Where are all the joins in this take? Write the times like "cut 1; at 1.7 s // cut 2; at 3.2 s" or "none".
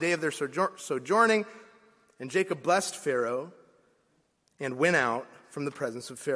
none